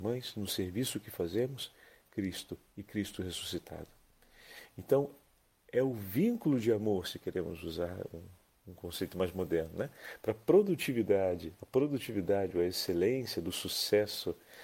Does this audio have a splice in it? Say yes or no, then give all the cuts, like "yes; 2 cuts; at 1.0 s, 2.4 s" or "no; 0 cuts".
no; 0 cuts